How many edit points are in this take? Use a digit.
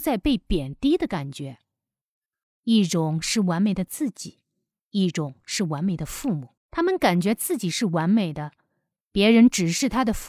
3